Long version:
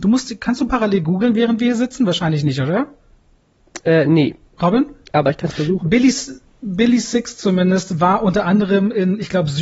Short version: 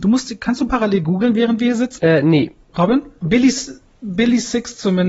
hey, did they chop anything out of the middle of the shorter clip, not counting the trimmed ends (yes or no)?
yes